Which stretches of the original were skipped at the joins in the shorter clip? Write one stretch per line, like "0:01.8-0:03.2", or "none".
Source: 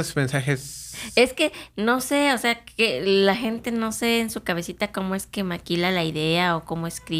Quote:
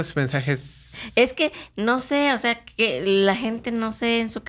none